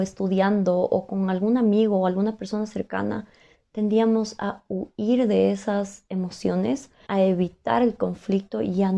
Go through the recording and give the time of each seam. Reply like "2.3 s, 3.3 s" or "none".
7.1 s